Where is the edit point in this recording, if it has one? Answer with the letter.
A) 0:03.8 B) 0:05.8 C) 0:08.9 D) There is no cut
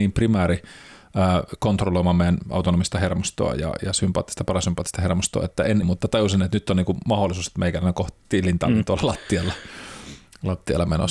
B